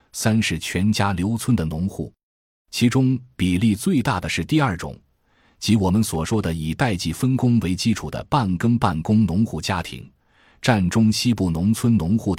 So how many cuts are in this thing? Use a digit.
0